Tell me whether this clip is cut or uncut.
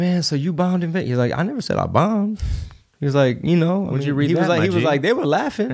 uncut